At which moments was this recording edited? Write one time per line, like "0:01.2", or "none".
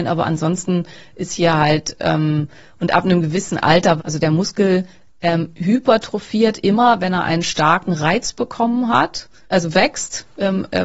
0:04.0
0:09.4

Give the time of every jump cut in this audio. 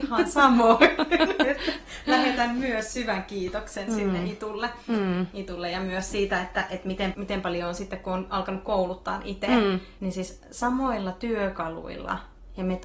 0:07.1
0:10.0

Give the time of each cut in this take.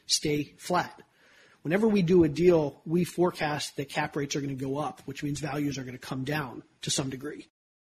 none

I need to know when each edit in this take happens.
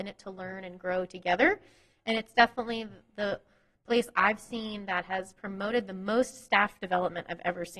none

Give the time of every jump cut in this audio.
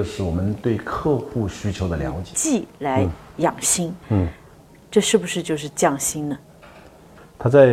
none

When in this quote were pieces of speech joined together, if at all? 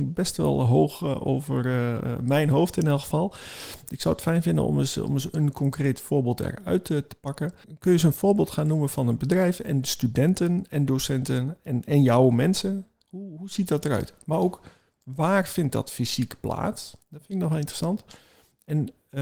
0:17.0

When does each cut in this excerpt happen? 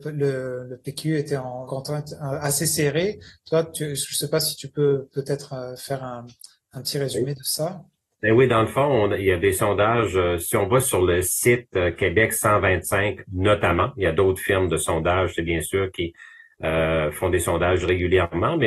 0:01.7

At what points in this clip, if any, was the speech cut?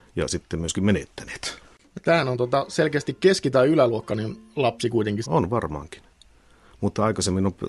0:05.2

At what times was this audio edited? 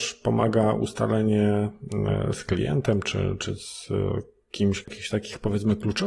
0:04.8

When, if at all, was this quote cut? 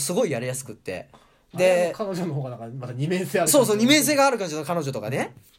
none

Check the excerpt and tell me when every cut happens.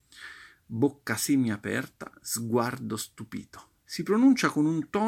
0:03.8

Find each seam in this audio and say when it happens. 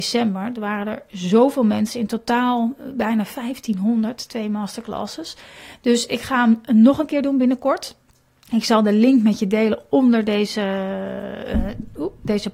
none

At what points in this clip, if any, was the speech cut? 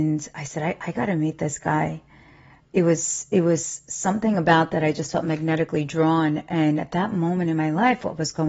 none

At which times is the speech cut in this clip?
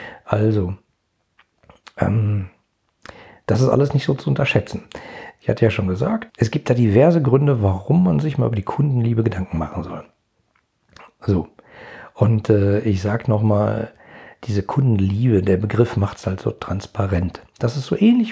0:06.3

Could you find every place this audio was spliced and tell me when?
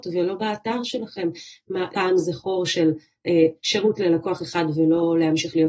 0:01.9
0:03.6

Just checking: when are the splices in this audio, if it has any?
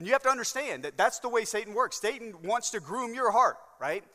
none

